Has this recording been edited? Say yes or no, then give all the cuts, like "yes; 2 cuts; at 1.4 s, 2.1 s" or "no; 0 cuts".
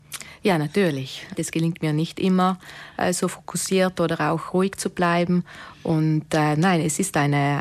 yes; 1 cut; at 1.3 s